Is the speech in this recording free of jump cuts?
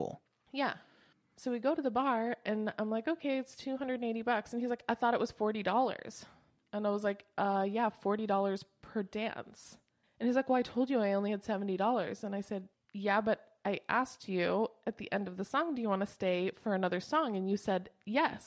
yes; 0 cuts

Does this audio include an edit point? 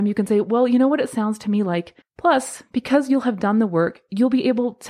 yes; 1 cut; at 2.0 s

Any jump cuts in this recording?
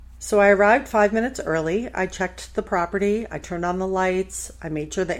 no; 0 cuts

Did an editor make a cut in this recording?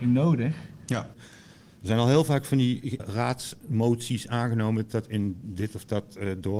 yes; 2 cuts; at 1.1 s, 3.0 s

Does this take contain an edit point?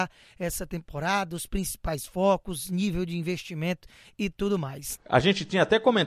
yes; 1 cut; at 5.0 s

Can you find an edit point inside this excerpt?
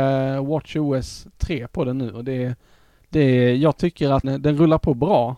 yes; 1 cut; at 4.2 s

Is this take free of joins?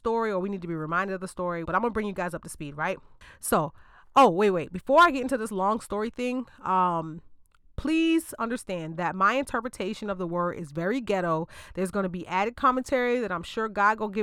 no; 1 cut; at 1.6 s

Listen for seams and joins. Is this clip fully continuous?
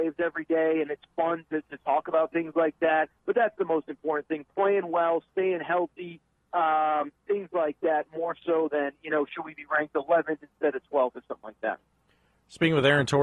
no; 1 cut; at 3.2 s

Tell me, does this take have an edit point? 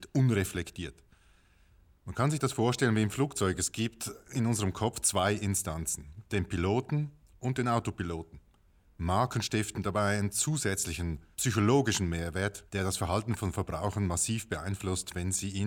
yes; 2 cuts; at 8.8 s, 12.7 s

